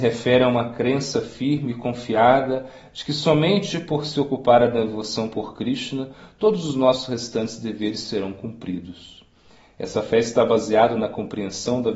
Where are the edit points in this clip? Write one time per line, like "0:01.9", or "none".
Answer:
none